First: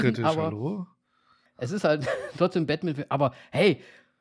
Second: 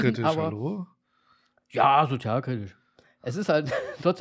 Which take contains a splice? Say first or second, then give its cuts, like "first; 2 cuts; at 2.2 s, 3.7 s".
first; 1 cut; at 1.5 s